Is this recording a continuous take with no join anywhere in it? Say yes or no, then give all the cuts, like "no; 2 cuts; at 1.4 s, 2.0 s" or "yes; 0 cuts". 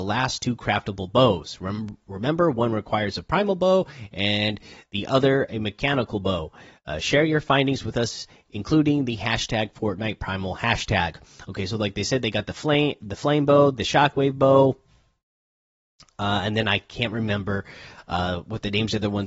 yes; 0 cuts